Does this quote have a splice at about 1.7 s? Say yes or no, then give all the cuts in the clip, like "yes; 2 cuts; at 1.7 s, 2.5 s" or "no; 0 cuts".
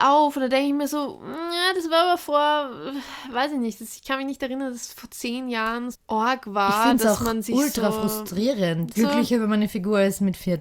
no; 2 cuts; at 5.9 s, 8.9 s